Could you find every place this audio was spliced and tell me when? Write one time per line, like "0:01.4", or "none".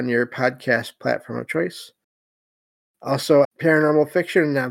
0:03.4